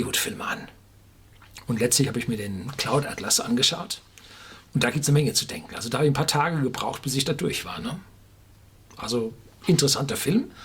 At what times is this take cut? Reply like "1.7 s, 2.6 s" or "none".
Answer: none